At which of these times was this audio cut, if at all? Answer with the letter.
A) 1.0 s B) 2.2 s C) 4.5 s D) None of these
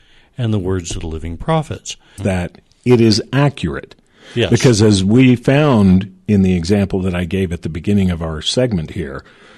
B